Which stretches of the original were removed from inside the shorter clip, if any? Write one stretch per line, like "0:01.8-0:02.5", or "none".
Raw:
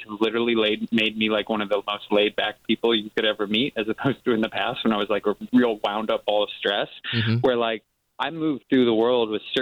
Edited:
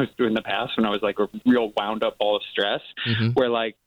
none